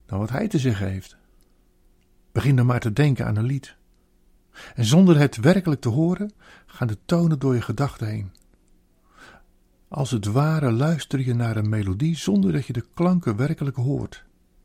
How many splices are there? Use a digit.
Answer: 1